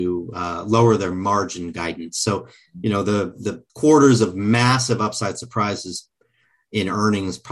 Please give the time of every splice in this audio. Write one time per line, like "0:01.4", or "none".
0:03.7

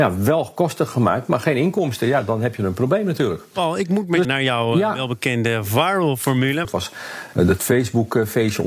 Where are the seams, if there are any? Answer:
0:04.2
0:06.6

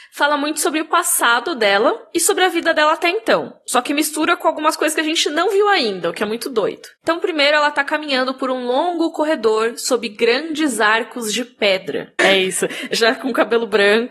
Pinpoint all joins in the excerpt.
0:12.2

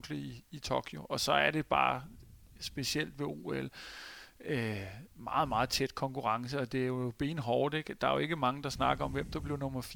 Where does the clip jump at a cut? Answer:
0:05.1

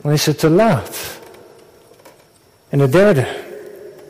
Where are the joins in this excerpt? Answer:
0:02.7

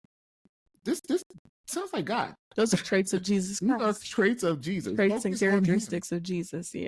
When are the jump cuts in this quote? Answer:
none

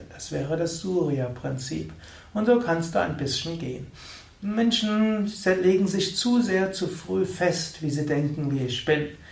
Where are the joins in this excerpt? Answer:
0:04.3

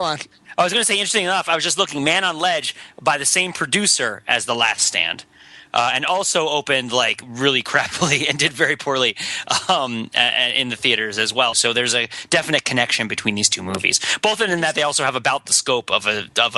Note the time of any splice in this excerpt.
0:11.5

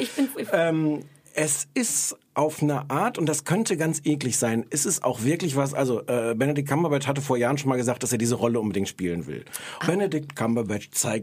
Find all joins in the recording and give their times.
0:09.8

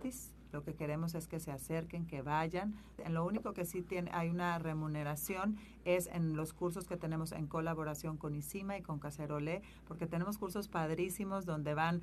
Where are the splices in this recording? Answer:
0:03.0

